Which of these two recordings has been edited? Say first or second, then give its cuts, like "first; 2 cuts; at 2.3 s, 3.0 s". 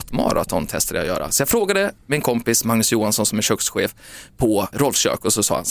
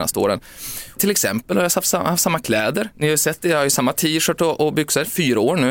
first; 1 cut; at 4.7 s